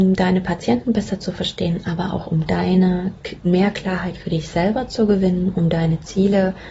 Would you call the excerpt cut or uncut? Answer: cut